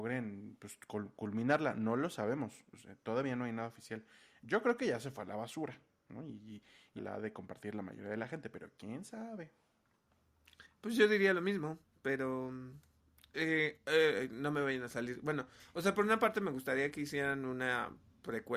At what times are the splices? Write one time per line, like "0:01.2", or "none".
0:07.0

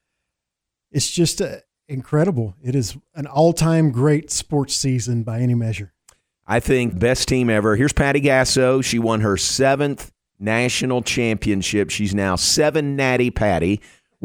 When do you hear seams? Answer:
0:06.9

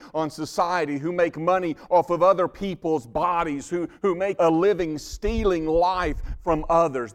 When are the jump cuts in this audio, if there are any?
0:04.4

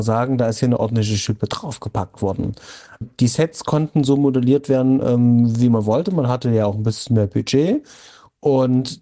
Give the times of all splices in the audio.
0:03.0

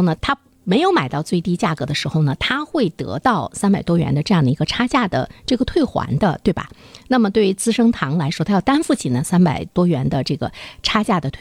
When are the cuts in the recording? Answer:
none

